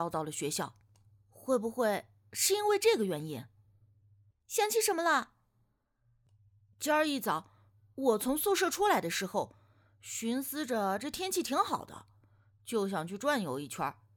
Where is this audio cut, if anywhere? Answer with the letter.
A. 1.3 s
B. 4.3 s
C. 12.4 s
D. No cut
B